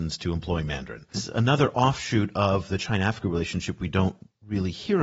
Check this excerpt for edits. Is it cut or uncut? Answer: cut